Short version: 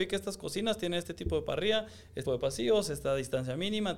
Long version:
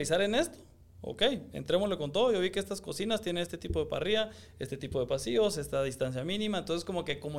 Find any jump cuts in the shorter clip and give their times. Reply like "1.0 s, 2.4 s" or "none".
2.3 s